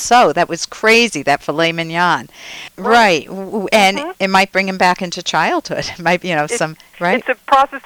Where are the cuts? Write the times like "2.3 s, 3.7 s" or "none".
2.7 s, 6.9 s